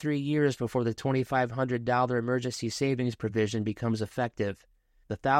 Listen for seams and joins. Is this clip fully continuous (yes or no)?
yes